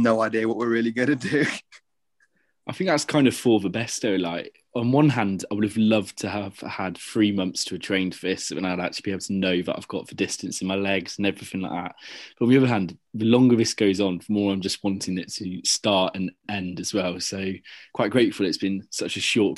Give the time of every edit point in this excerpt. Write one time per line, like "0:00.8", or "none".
none